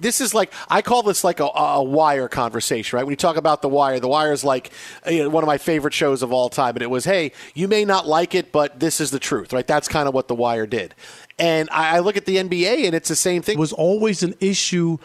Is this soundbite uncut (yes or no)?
no